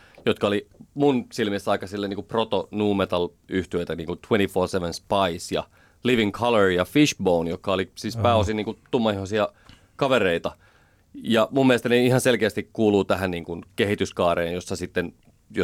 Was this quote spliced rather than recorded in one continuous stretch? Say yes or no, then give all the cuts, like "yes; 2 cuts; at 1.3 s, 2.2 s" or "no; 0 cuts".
no; 0 cuts